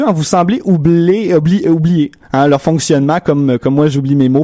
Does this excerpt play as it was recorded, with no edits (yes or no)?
yes